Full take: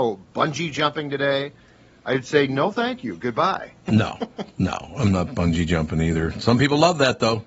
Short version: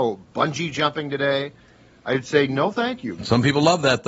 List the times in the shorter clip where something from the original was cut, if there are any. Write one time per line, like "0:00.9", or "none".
0:03.2

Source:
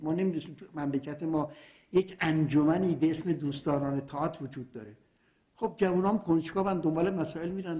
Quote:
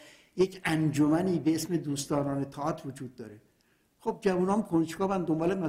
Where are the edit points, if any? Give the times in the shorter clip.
none

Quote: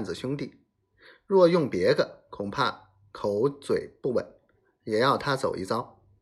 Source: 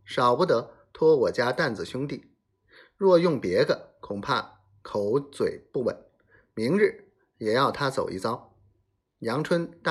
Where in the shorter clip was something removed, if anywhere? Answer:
0:04.5

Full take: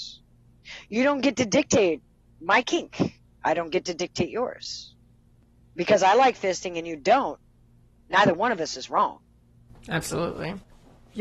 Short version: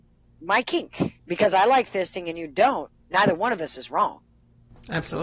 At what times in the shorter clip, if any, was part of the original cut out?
0:01.2
0:03.0

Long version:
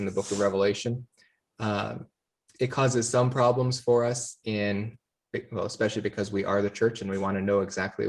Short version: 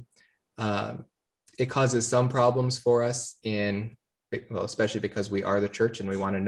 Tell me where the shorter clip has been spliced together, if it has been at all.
none

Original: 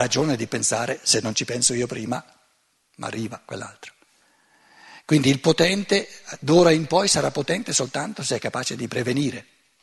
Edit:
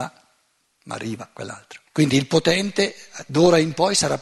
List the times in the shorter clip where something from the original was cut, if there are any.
0:01.9

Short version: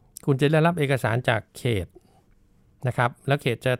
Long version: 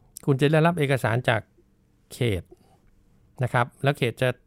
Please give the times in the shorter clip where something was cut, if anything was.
0:01.5

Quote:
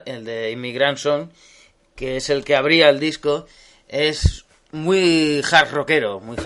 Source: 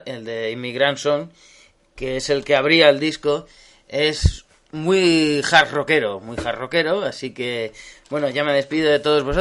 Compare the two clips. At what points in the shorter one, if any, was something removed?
none

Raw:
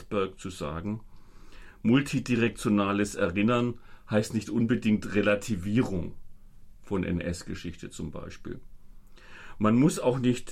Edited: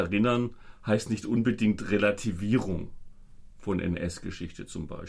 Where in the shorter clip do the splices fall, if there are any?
none

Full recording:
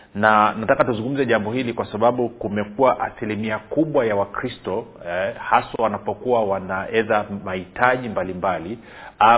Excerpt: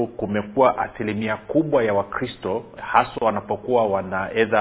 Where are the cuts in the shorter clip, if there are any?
0:02.8

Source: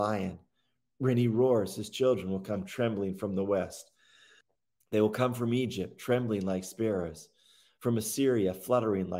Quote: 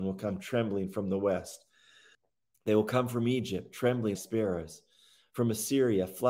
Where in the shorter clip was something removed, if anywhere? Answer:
0:04.1

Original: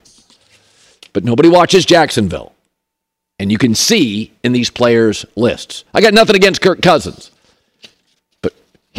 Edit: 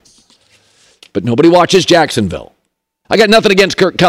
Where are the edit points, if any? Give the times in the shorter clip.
0:03.0

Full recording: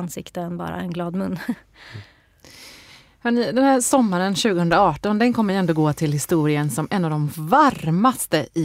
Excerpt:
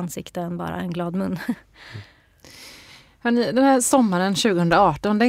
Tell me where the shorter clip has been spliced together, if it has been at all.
none

